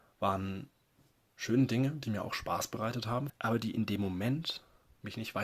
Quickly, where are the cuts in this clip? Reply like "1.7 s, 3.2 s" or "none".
3.3 s